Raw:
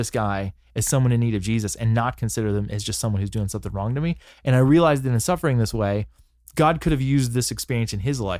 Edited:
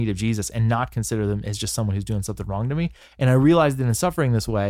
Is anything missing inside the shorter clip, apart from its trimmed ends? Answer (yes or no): no